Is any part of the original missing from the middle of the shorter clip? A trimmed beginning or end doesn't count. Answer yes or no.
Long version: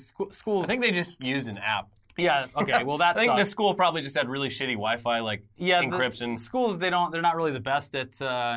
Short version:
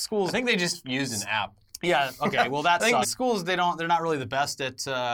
yes